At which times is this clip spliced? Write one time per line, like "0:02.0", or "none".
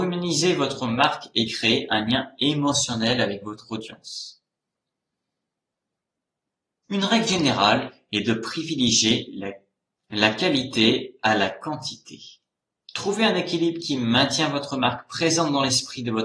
0:06.8